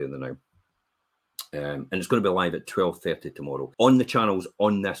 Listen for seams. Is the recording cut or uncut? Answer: cut